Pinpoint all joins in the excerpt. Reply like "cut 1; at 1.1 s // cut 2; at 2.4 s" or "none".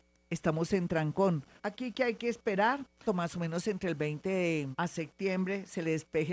cut 1; at 1.6 s // cut 2; at 3.1 s // cut 3; at 4.7 s